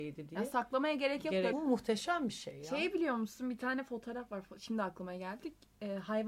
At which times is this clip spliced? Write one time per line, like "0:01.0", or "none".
0:01.5